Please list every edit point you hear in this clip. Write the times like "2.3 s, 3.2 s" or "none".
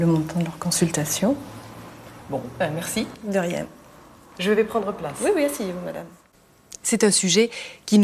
none